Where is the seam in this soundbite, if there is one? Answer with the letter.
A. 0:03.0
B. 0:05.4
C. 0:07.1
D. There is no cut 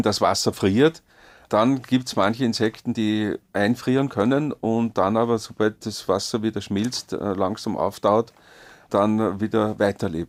D